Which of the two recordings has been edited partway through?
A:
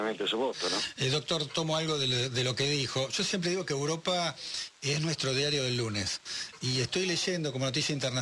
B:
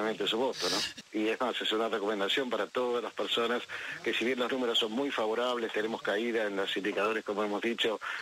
B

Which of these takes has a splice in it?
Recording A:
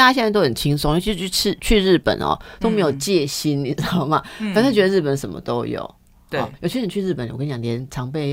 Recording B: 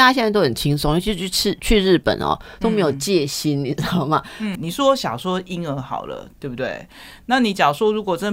B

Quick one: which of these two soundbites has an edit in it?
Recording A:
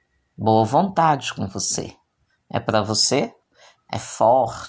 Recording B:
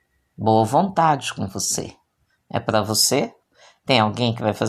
A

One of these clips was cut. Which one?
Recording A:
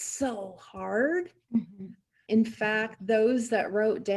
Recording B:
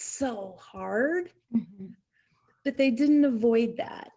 A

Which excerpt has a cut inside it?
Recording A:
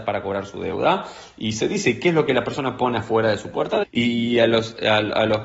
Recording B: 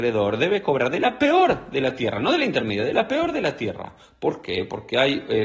A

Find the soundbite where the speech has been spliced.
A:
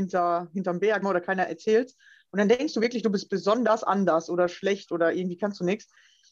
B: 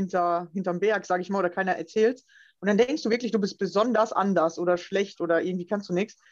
A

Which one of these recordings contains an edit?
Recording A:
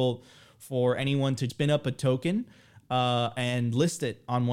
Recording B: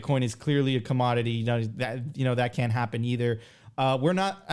A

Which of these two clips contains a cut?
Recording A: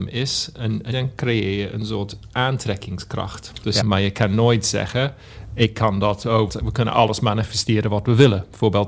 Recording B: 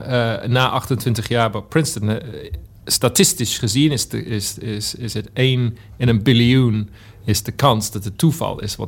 A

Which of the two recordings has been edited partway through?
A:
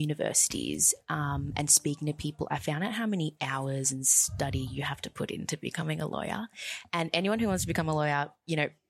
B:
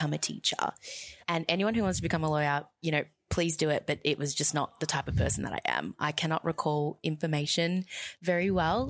B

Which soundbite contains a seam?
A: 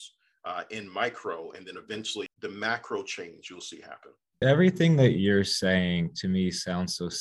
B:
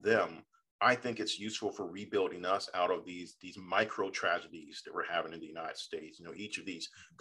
A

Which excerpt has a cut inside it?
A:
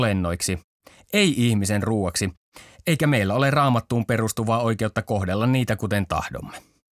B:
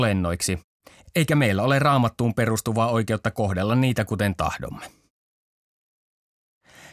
B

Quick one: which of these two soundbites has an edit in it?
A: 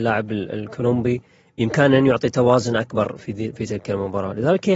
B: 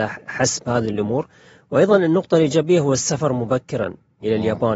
A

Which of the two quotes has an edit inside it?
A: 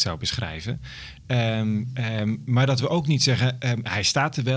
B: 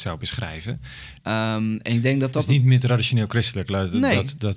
B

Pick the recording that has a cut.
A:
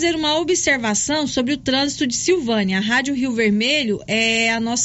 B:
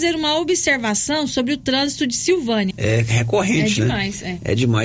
B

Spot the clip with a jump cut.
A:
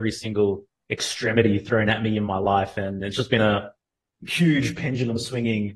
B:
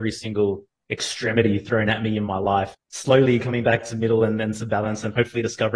B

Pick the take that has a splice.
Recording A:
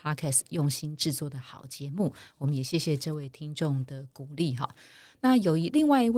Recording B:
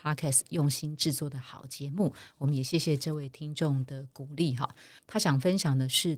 B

